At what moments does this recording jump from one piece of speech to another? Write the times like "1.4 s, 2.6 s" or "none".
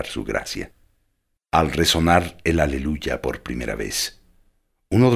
1.4 s